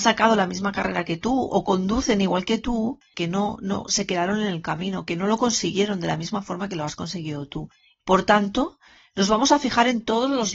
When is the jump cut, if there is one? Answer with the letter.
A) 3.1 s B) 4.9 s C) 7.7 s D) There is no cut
A